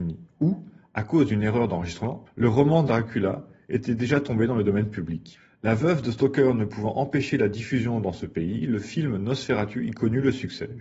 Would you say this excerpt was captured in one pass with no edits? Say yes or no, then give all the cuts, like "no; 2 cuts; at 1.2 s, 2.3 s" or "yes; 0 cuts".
no; 1 cut; at 2.3 s